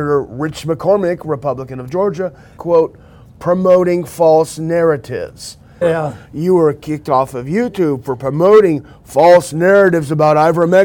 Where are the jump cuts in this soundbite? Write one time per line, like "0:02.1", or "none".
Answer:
0:02.6
0:05.8